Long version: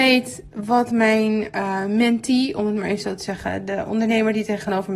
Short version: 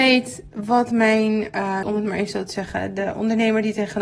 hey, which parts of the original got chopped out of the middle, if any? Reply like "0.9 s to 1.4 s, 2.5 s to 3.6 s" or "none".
1.8 s to 2.5 s